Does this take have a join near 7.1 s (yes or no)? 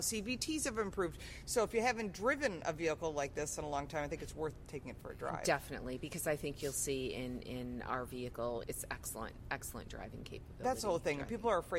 no